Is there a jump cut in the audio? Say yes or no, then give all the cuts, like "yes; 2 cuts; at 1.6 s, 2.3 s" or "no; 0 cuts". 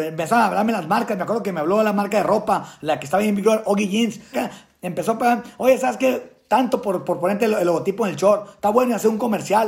yes; 1 cut; at 4.3 s